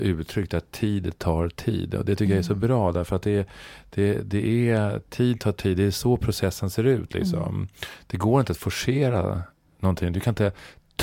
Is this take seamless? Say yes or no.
yes